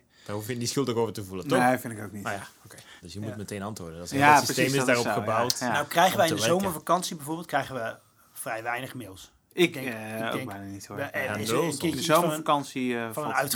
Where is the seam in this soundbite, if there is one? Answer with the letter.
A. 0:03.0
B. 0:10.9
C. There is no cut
A